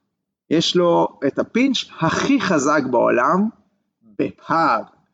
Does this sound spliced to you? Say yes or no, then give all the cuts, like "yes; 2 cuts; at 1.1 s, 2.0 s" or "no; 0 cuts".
no; 0 cuts